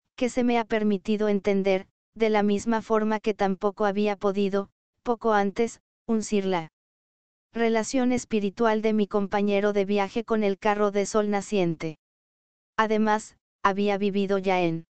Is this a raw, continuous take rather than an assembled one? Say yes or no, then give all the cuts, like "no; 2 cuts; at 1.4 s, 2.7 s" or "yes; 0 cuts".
yes; 0 cuts